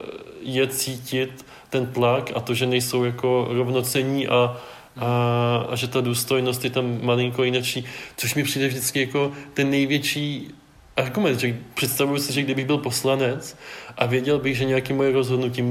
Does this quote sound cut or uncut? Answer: uncut